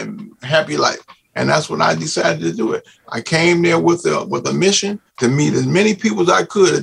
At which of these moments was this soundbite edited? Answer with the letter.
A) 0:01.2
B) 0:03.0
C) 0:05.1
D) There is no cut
C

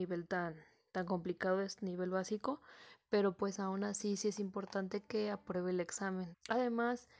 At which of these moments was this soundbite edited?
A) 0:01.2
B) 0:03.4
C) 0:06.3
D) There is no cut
C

